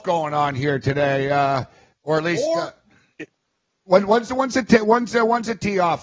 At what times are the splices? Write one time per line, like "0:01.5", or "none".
none